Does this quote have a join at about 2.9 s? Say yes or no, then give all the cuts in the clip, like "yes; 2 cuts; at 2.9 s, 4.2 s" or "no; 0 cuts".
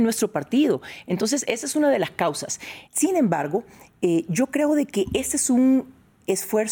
yes; 1 cut; at 2.9 s